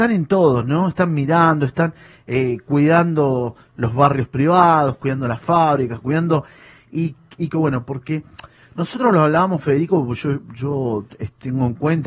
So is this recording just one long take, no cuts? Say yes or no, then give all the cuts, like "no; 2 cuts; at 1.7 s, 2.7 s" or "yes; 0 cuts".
no; 2 cuts; at 6.0 s, 7.5 s